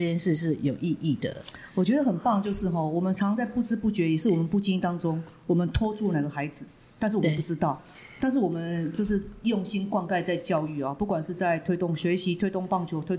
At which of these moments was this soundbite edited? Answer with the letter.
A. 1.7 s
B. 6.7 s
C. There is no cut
C